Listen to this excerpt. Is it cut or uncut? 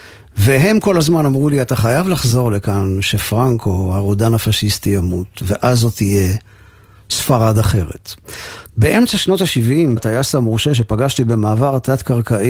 cut